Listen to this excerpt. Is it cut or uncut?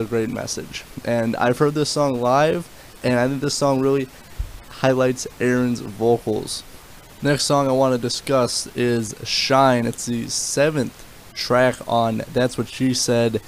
uncut